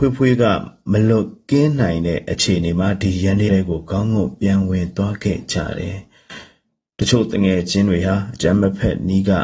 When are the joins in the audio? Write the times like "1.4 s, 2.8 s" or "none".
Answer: 3.5 s